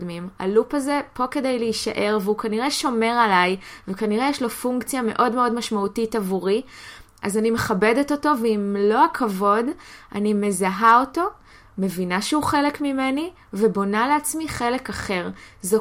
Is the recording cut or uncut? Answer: uncut